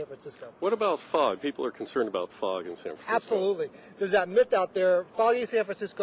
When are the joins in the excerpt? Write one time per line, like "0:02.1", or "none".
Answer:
none